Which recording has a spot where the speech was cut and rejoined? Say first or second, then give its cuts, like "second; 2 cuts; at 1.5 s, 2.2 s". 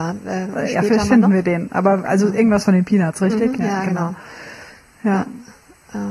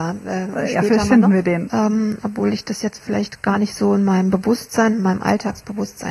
second; 1 cut; at 1.7 s